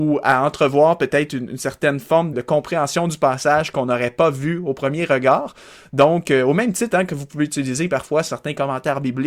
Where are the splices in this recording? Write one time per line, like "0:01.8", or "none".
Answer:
0:02.3